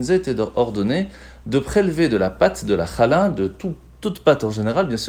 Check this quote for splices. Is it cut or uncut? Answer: uncut